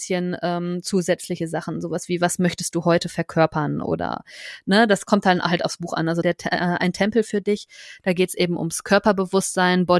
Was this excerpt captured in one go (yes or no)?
no